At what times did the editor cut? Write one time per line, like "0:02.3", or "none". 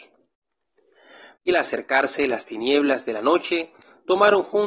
0:01.4